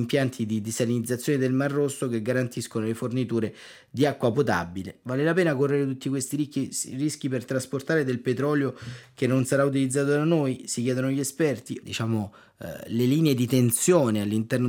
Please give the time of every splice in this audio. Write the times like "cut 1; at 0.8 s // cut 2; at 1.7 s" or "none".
cut 1; at 5.0 s // cut 2; at 11.8 s